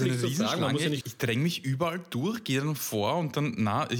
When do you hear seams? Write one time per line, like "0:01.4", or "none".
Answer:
0:01.0